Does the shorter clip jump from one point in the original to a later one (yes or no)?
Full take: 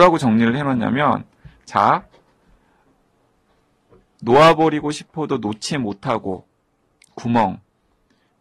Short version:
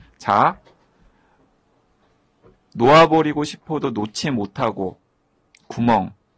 no